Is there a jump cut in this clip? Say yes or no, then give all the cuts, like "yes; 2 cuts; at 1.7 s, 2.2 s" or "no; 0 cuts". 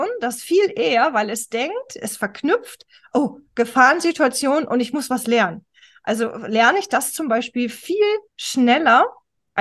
no; 0 cuts